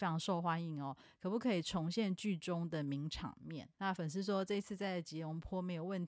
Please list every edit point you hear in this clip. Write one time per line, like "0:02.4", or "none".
0:03.7